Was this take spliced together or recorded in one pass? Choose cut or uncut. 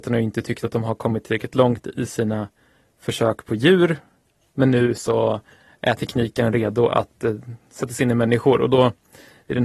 uncut